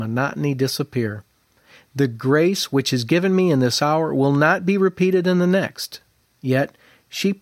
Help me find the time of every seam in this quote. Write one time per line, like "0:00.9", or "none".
0:06.3